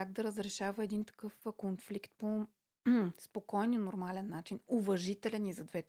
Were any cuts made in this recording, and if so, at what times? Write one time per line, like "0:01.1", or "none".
none